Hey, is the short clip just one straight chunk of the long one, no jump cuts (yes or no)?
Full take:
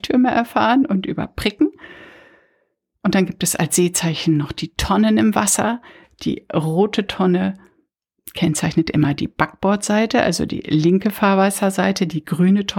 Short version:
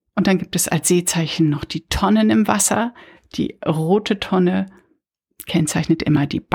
yes